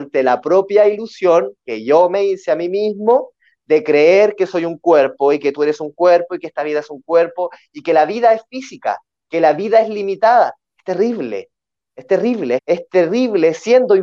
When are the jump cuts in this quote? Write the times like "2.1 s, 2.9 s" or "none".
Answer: 10.6 s, 12.6 s